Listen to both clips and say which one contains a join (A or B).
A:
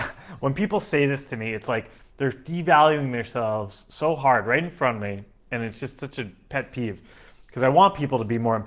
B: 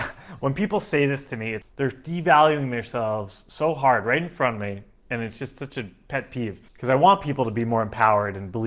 B